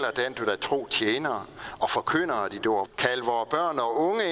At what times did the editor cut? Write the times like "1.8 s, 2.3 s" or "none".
2.9 s